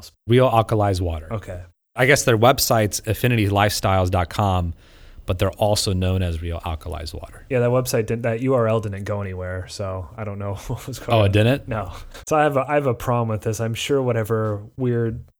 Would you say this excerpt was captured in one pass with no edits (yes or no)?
no